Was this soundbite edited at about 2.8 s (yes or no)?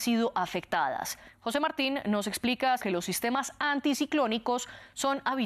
yes